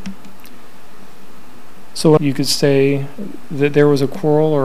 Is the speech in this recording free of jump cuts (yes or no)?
no